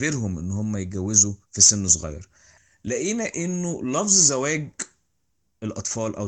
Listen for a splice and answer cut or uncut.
cut